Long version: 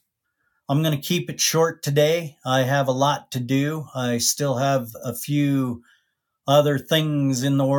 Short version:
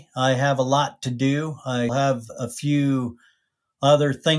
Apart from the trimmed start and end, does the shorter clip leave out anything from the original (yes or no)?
yes